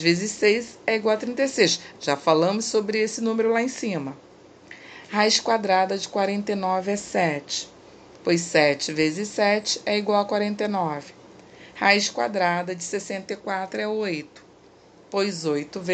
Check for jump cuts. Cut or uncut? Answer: uncut